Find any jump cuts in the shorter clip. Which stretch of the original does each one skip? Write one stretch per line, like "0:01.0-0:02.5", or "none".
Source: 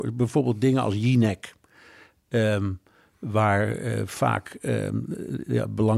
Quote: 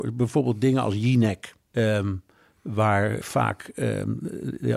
0:01.6-0:02.2
0:03.8-0:04.1